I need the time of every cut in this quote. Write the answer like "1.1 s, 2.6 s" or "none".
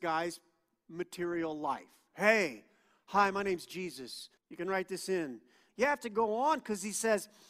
4.4 s, 5.7 s

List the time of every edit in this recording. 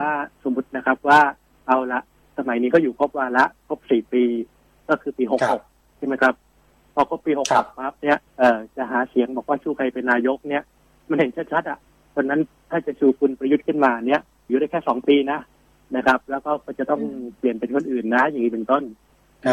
8.3 s, 14.5 s

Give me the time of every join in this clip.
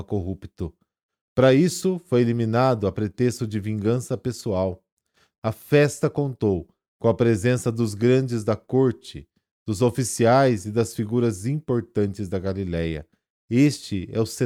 5.4 s

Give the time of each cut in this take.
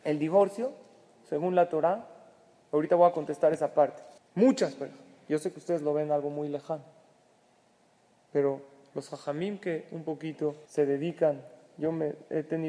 4.2 s, 10.7 s

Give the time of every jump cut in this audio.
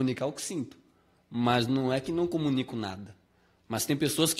none

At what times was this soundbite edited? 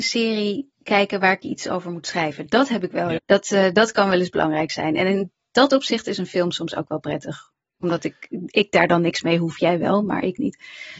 3.2 s

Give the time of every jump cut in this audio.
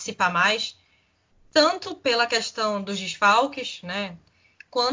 none

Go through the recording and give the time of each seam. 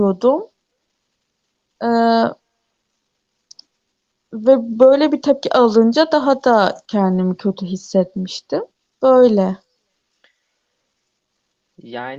8.8 s

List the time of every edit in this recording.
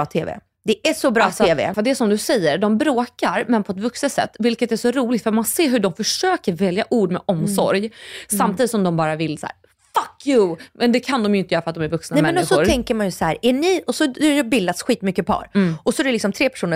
1.7 s

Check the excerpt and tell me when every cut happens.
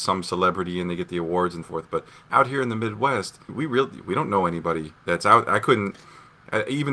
1.6 s, 3.5 s, 5.0 s

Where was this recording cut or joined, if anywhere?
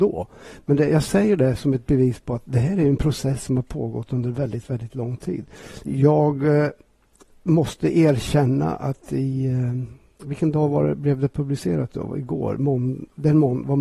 5.8 s

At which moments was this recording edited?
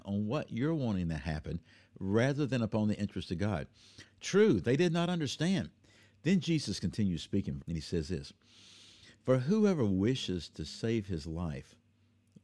5.8 s, 7.6 s

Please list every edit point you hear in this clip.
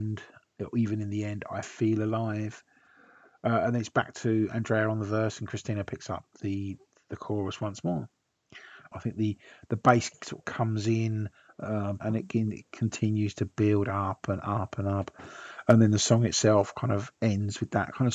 8.9 s, 12.0 s

